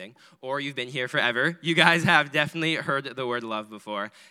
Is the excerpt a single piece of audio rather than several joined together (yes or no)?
yes